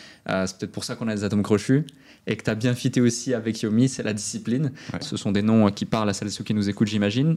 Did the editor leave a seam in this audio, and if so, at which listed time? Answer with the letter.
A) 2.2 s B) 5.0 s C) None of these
B